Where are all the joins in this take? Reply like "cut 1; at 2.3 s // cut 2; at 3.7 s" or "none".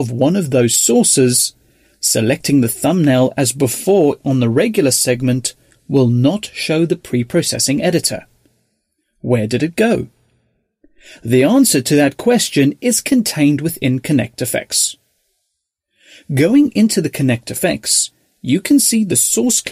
none